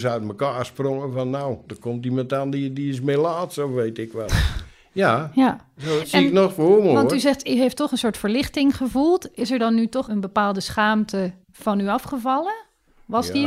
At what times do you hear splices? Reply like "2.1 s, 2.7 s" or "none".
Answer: 6.0 s, 10.0 s, 11.4 s